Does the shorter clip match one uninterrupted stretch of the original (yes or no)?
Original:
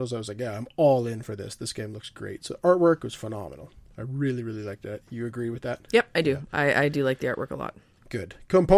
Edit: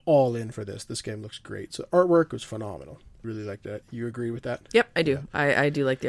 no